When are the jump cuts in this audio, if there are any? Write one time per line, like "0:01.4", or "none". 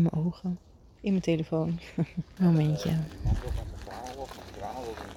0:01.0
0:02.4